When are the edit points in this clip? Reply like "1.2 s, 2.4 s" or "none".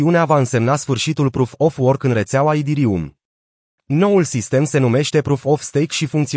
3.8 s